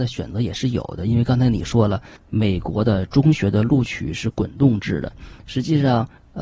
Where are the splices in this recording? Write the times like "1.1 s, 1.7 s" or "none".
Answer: none